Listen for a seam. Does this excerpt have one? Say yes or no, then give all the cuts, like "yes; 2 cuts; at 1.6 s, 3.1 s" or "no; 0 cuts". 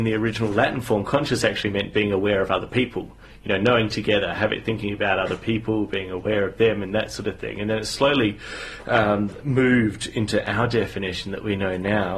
no; 0 cuts